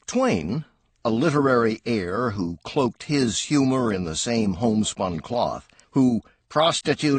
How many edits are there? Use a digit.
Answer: 1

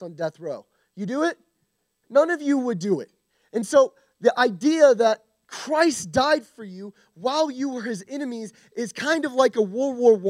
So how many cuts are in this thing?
1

